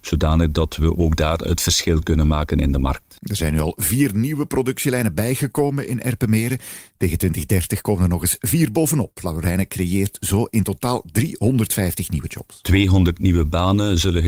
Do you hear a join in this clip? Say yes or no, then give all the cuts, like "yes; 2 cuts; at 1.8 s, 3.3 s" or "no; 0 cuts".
no; 0 cuts